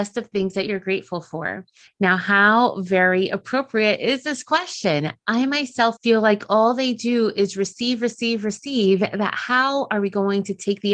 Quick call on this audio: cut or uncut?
cut